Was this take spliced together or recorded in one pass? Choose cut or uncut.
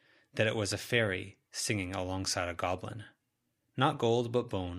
cut